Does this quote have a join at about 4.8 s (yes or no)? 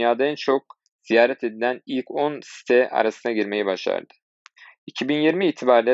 no